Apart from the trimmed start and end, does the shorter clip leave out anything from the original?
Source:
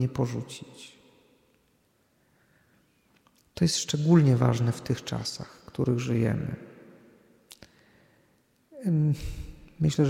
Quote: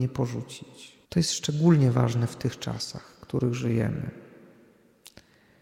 yes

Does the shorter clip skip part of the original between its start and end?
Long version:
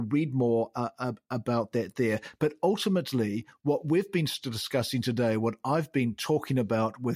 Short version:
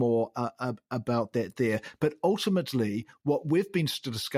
no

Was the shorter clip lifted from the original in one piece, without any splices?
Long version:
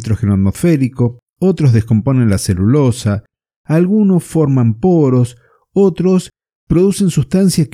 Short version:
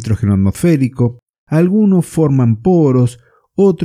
no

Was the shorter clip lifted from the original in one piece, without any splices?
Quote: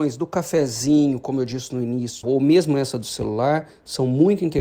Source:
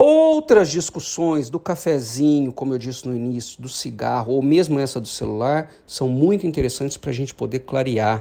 no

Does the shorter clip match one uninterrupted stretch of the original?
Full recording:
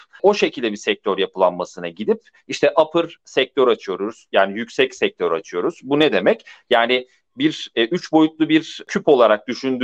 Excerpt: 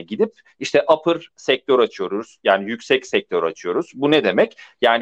yes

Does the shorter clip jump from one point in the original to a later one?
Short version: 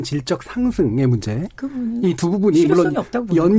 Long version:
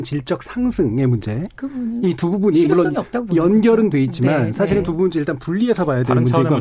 no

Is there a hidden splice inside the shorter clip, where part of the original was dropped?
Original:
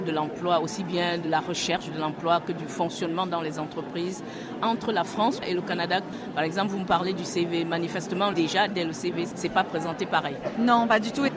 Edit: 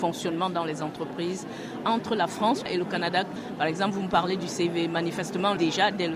no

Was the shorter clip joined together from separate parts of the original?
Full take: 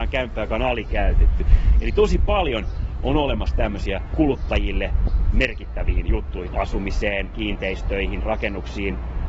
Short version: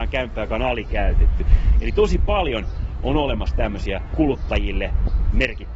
no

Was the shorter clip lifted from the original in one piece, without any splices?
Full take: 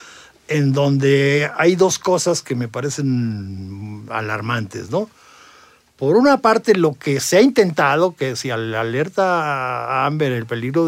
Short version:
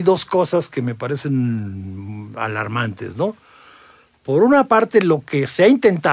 yes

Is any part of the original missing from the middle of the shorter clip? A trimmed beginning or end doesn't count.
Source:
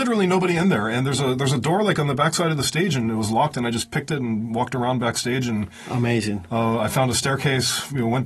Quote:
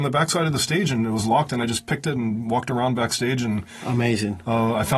no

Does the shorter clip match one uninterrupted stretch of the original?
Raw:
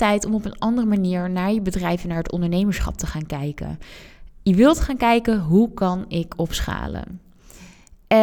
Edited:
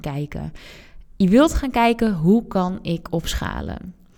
yes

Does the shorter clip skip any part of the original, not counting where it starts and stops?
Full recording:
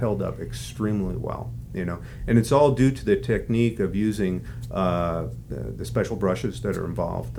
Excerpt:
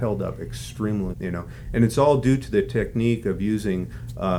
yes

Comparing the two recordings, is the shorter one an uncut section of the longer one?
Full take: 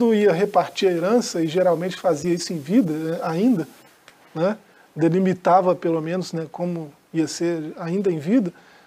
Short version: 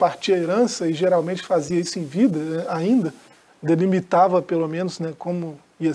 no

